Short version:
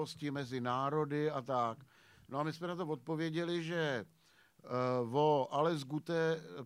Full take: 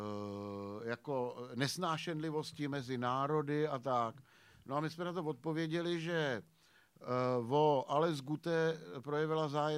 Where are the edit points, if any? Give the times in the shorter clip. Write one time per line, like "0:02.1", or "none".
none